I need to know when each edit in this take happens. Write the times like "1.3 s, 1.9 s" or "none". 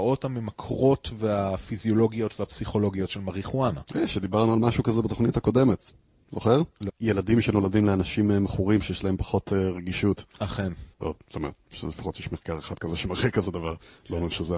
6.9 s, 10.9 s